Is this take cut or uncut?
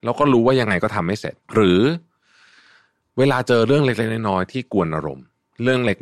cut